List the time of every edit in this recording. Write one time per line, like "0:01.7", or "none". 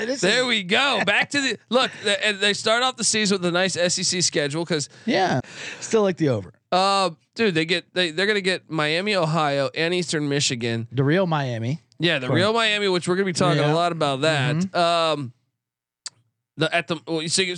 0:05.4